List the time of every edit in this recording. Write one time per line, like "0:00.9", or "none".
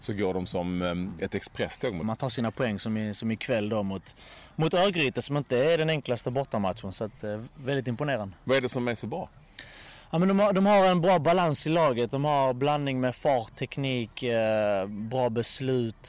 0:02.0